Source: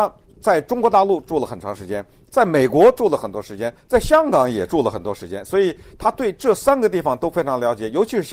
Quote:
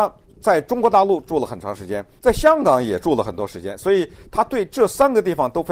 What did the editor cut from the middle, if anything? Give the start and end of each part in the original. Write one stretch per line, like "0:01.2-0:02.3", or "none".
0:02.2-0:03.9

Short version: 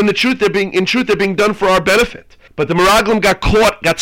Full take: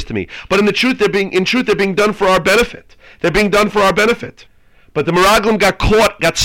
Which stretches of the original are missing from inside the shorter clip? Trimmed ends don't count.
0:03.1-0:04.8

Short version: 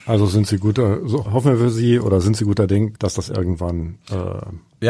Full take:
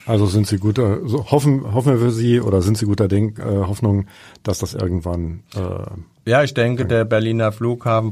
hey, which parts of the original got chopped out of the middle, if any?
0:01.3-0:01.7
0:03.4-0:04.4

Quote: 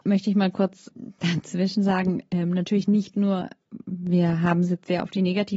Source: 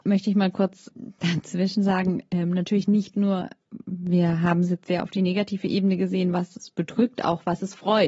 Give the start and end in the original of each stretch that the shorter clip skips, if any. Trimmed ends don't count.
none

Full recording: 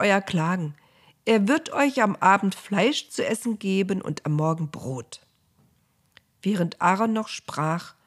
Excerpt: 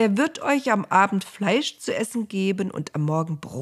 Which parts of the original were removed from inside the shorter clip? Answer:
none

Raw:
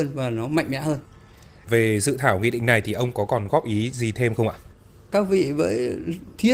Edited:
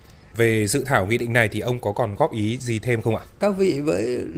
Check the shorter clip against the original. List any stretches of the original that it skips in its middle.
0:04.6-0:05.0

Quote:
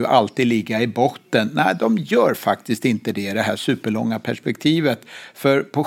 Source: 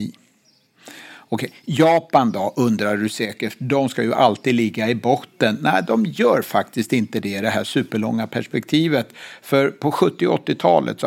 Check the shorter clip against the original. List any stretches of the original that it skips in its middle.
none

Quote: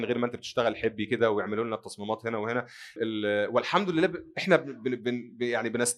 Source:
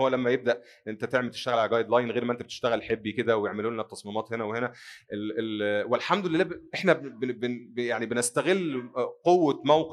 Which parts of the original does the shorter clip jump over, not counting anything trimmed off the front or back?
0:05.0-0:05.3

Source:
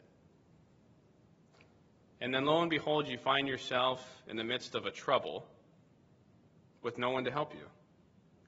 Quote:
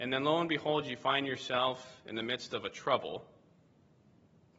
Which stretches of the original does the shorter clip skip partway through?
none

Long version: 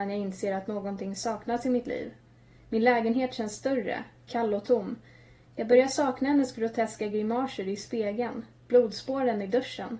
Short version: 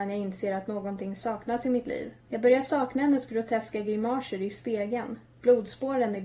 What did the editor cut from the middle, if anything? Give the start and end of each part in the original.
0:02.3-0:05.5

